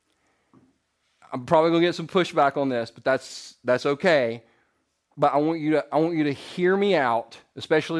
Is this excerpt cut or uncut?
uncut